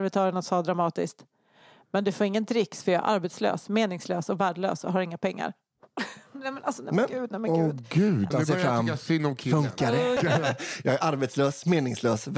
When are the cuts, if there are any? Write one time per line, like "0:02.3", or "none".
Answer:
0:08.3
0:10.2